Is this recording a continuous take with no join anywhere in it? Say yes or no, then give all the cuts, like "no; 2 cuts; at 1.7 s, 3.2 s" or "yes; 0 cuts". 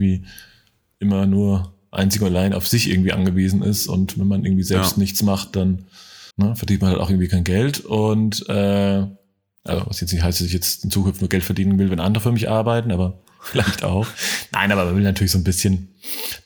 no; 1 cut; at 6.3 s